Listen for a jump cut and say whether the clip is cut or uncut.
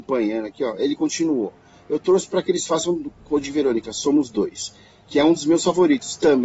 uncut